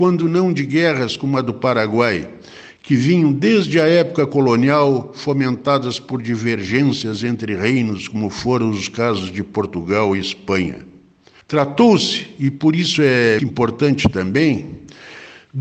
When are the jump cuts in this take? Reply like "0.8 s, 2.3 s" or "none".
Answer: 11.4 s, 13.4 s